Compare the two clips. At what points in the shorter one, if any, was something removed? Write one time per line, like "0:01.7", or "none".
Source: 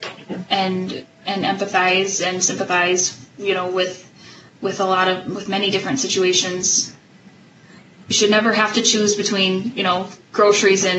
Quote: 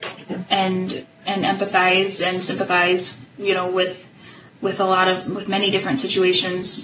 none